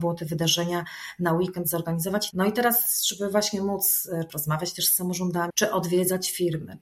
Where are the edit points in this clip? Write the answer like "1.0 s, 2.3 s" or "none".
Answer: 2.3 s, 4.3 s, 5.5 s